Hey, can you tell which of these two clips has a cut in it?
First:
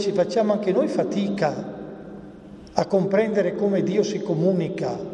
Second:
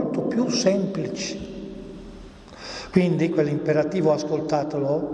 second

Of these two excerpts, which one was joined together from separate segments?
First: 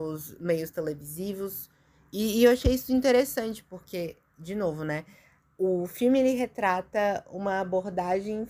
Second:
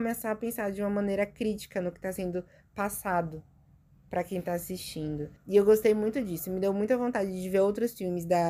second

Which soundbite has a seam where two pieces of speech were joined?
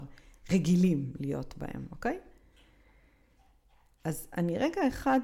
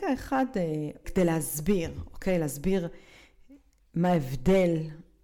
second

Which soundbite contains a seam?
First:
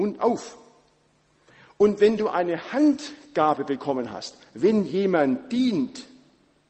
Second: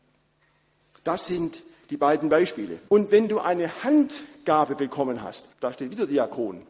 second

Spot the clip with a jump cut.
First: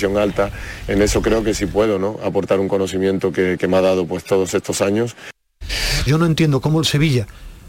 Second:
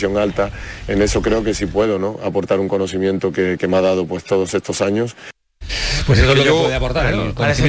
first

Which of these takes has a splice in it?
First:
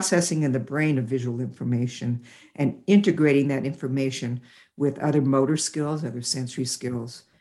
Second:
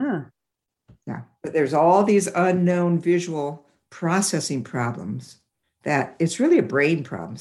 second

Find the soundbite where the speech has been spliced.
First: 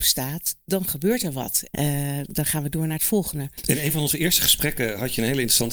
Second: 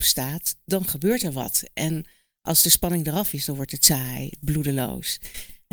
first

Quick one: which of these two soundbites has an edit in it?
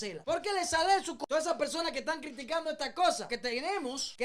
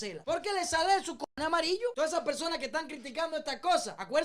first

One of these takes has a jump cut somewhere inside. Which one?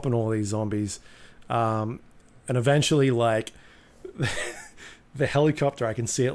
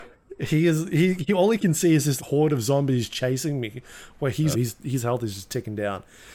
second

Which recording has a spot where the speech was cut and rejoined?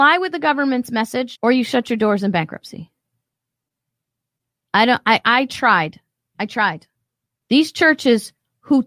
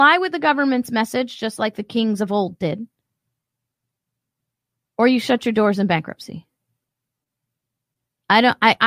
first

